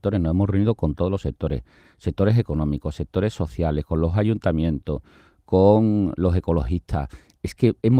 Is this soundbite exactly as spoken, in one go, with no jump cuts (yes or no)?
yes